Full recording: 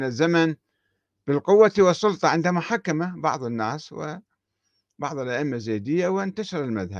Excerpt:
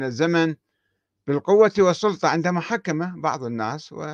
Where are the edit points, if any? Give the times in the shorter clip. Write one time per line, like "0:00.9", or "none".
none